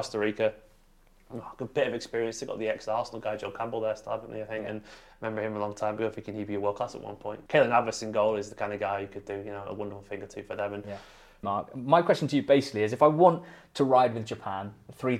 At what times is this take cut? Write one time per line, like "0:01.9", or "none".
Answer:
0:07.5
0:11.4